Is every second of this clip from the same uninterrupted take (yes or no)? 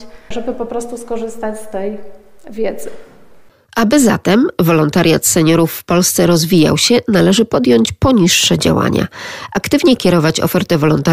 yes